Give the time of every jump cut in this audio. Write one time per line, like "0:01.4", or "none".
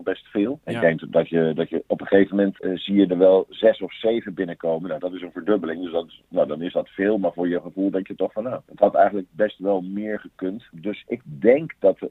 0:05.0

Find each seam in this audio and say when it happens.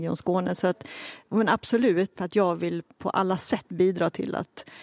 0:02.1

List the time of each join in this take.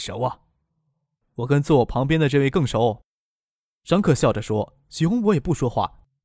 none

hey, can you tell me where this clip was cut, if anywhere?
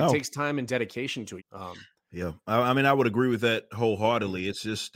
0:01.4

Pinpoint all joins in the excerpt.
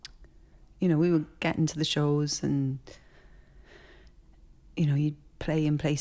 none

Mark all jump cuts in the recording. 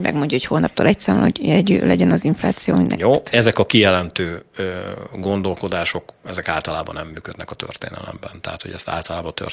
none

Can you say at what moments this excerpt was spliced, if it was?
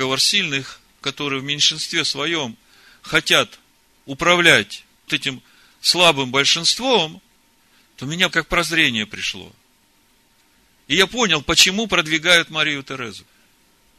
0:05.1
0:08.3

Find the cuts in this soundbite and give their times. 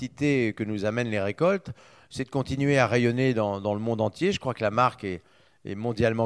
none

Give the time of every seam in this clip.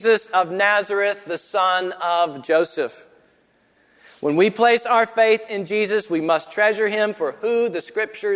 none

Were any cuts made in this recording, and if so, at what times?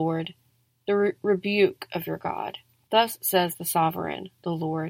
0:02.9

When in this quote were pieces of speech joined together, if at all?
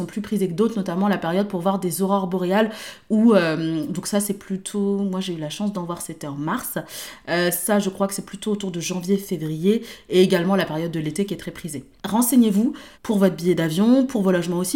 0:12.9

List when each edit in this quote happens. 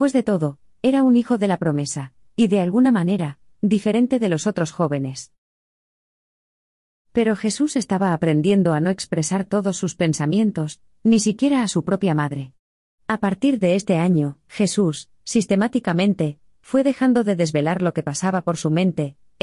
0:10.9

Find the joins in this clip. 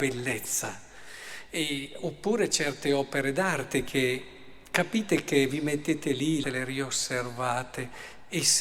0:06.4

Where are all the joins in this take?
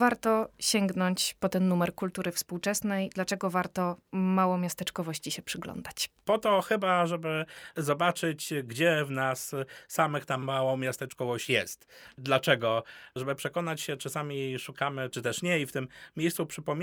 0:06.2

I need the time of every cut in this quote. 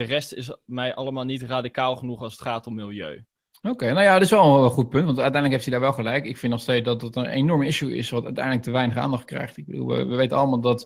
none

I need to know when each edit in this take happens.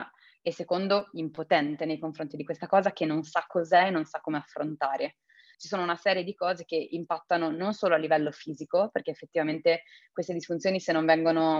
0:05.5

